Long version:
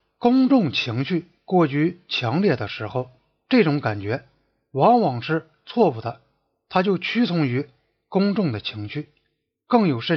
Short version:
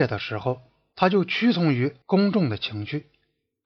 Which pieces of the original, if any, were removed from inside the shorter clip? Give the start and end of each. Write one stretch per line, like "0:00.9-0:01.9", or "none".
0:03.4-0:06.7
0:07.8-0:08.0